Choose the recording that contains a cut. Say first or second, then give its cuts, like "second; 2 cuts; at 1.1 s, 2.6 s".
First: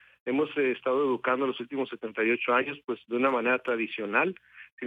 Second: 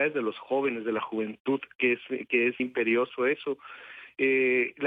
second; 1 cut; at 2.6 s